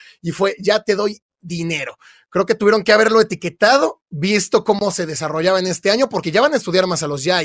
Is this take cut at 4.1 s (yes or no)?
yes